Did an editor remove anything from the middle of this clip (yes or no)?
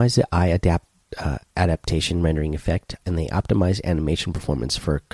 no